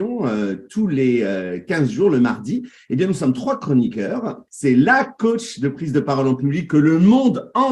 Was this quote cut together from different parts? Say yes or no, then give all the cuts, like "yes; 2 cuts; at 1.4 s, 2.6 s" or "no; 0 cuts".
yes; 1 cut; at 4.5 s